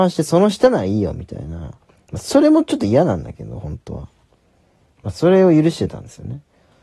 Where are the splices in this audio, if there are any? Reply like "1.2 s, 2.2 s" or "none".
none